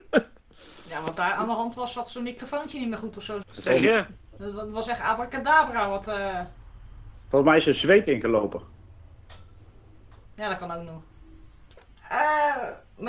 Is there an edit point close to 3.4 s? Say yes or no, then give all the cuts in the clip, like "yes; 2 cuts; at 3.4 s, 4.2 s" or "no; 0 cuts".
yes; 1 cut; at 3.4 s